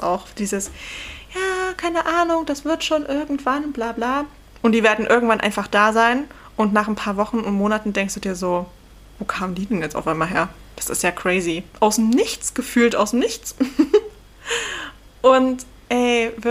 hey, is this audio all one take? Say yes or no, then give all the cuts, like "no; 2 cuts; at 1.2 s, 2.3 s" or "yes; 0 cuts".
no; 2 cuts; at 4.5 s, 11.7 s